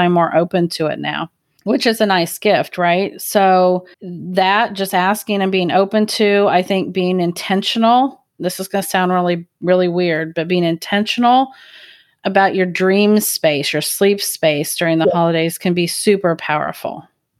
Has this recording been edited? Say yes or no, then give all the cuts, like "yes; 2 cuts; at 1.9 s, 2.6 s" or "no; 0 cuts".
yes; 1 cut; at 3.9 s